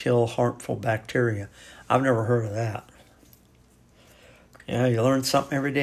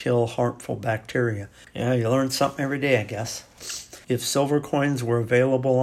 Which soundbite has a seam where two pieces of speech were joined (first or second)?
second